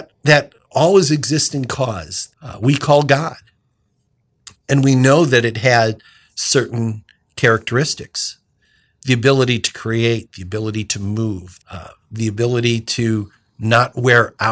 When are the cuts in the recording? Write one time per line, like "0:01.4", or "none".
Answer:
0:02.3
0:11.6